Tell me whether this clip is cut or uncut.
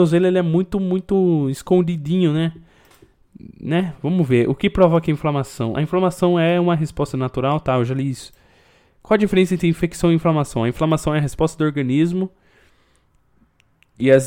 uncut